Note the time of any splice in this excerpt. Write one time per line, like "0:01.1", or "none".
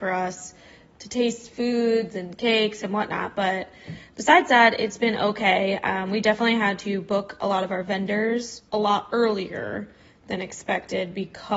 0:08.7